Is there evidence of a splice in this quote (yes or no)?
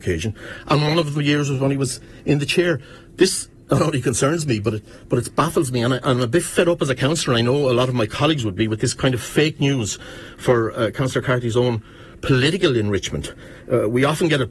no